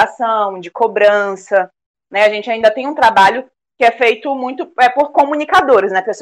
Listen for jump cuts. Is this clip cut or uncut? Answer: uncut